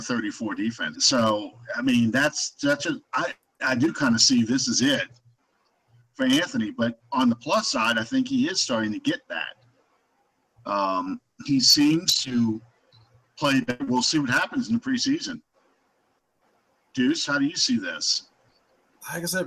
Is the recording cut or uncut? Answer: cut